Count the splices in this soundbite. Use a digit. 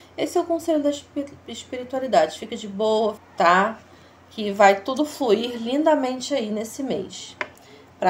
1